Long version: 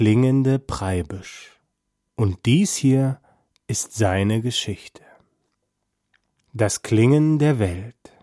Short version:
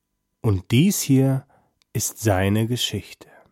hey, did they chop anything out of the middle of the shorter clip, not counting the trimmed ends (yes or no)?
no